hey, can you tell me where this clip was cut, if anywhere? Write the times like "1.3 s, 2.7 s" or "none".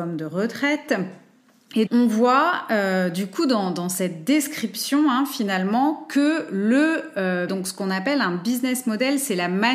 1.9 s, 7.5 s

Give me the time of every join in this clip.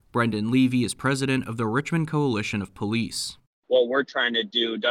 none

